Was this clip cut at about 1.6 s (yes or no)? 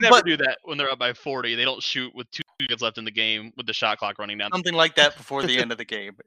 no